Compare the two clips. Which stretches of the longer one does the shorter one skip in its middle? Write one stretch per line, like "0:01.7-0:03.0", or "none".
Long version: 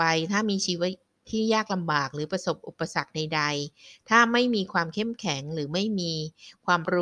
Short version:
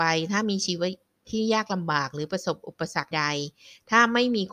0:03.1-0:03.3